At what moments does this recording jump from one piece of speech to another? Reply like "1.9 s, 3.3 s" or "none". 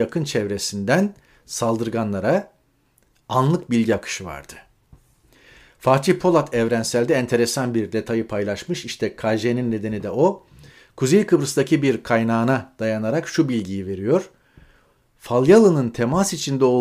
none